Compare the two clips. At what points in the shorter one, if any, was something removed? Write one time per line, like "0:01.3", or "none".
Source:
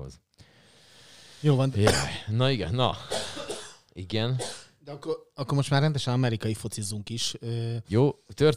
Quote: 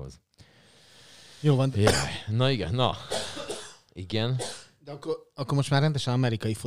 none